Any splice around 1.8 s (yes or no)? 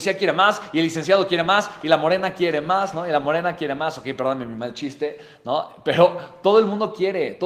no